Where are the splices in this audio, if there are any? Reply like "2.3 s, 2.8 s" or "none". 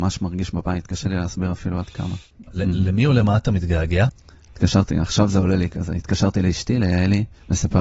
2.5 s, 4.5 s